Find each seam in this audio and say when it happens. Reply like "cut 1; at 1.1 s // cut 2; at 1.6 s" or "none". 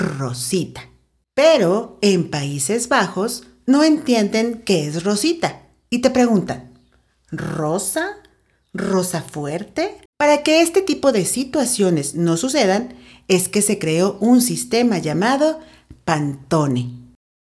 cut 1; at 10.1 s // cut 2; at 16.0 s